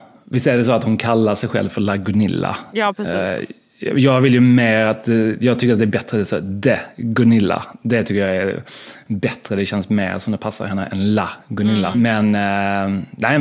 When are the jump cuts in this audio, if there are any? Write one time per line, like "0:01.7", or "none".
0:11.9